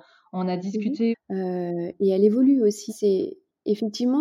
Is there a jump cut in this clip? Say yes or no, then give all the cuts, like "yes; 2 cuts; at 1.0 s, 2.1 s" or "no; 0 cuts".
yes; 2 cuts; at 1.1 s, 2.9 s